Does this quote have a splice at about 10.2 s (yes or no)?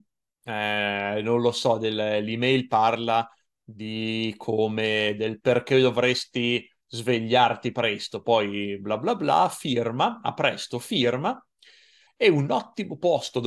no